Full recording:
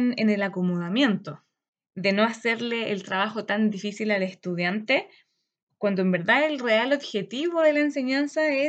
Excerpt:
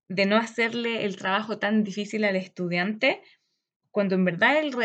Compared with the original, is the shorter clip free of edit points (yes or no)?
yes